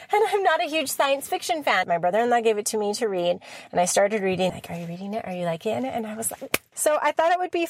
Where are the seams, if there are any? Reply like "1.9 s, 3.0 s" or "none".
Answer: 1.8 s, 4.5 s, 6.7 s